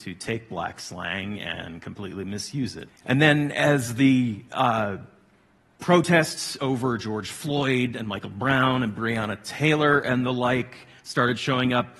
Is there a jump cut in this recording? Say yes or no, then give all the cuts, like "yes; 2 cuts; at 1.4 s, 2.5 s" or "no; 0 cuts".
yes; 1 cut; at 2.9 s